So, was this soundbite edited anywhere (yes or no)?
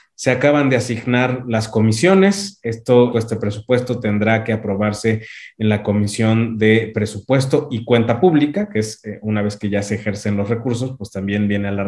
yes